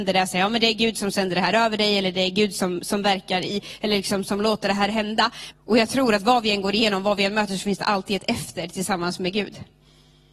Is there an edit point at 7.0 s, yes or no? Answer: no